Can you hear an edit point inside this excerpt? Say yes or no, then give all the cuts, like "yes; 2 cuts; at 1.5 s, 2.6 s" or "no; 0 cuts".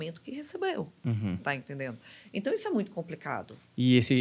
no; 0 cuts